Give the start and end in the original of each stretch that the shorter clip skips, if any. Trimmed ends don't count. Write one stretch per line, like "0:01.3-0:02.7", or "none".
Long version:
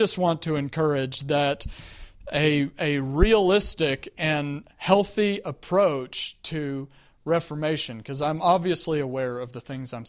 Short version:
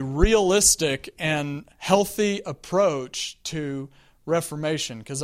none